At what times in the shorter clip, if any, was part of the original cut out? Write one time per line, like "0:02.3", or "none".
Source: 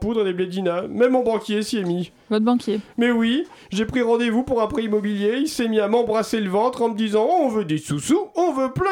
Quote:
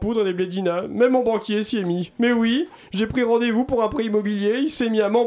0:02.2